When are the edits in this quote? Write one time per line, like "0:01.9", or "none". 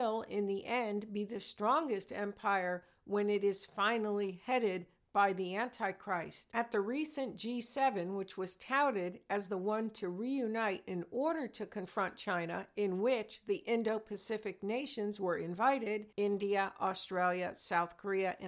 0:16.1